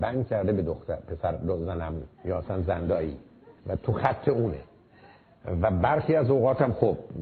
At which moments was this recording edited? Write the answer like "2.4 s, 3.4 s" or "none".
2.1 s, 3.6 s